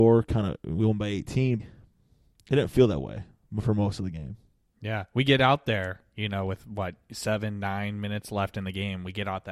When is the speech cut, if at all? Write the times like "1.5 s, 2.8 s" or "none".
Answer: 1.6 s